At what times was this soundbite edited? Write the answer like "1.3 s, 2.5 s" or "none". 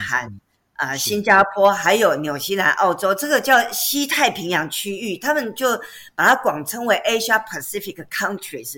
none